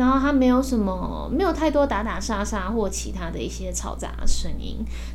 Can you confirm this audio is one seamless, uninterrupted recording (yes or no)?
yes